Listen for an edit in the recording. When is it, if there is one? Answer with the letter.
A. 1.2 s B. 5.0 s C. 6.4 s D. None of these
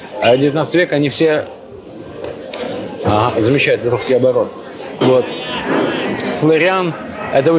B